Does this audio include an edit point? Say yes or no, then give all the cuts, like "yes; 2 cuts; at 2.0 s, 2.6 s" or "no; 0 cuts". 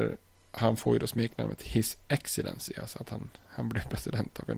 no; 0 cuts